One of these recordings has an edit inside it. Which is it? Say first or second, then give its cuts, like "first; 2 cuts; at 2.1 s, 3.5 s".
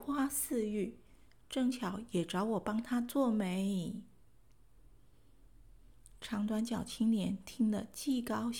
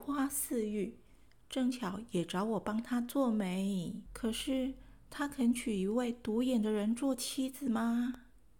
second; 1 cut; at 4.1 s